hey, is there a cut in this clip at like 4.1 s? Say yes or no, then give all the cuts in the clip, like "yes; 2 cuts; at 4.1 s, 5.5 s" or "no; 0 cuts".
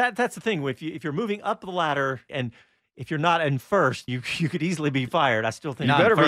yes; 2 cuts; at 2.3 s, 4.1 s